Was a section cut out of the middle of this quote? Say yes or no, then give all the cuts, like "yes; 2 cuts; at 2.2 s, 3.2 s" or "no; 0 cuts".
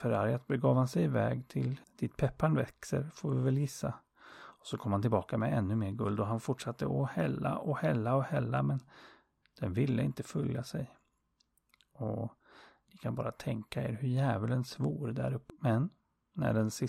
yes; 2 cuts; at 1.8 s, 15.5 s